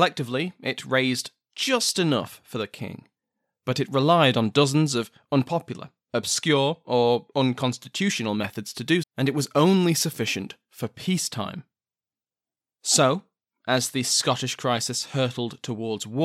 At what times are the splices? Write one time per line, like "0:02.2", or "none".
0:09.0